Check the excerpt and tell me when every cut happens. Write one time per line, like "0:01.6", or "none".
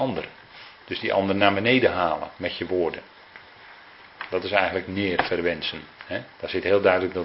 0:06.3